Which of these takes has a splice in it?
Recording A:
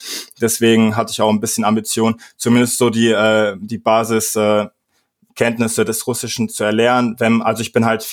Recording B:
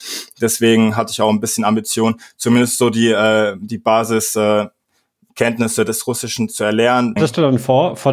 B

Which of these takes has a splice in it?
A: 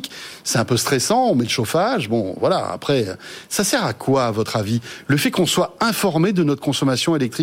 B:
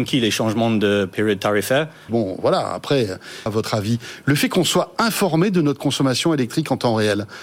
B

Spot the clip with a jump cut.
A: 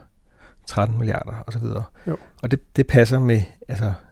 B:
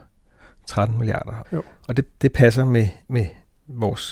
B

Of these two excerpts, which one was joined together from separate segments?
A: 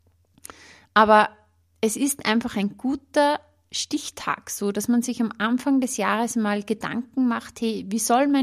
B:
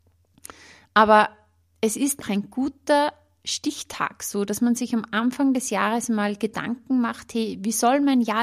B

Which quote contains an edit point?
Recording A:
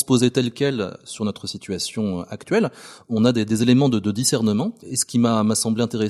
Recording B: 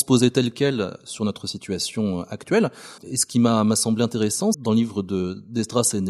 B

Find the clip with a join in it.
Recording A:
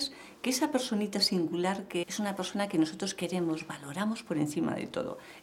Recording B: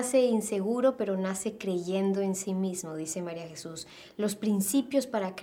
A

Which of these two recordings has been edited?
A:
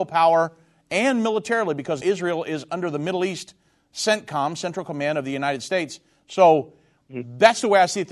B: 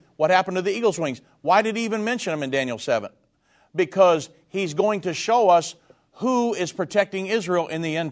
A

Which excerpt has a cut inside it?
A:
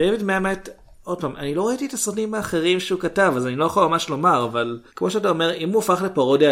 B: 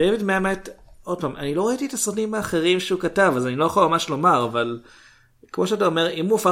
A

